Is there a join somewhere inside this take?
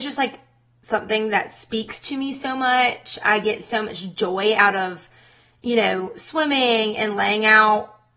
no; 0 cuts

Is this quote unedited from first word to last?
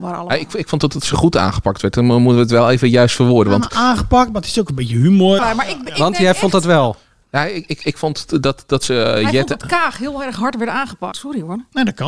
no; 2 cuts; at 5.4 s, 11.1 s

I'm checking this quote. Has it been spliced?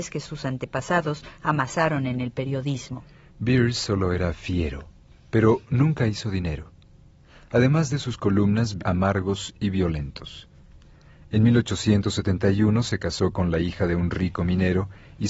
yes; 1 cut; at 8.8 s

